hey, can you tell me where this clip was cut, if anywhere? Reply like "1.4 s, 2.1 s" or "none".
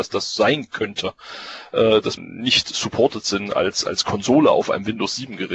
2.2 s